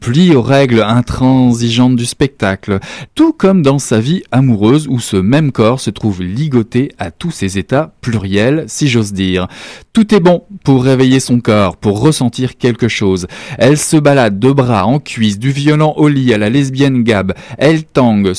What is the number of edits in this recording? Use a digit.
1